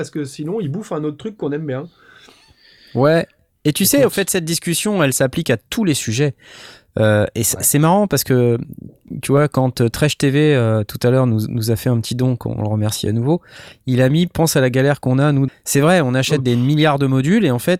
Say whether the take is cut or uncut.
cut